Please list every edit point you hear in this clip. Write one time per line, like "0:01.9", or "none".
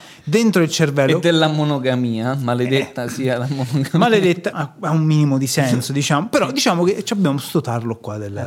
0:04.5